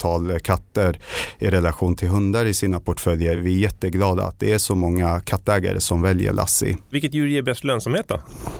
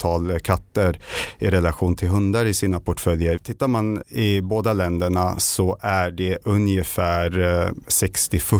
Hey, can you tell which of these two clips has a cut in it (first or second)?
second